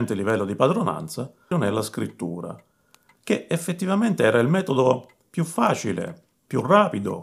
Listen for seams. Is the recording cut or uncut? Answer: cut